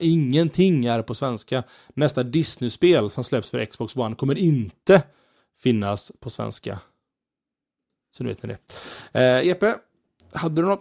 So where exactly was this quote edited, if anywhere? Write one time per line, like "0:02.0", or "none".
none